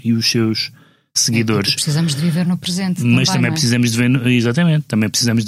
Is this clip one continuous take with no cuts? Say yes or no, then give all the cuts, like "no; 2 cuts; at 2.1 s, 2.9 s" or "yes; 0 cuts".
yes; 0 cuts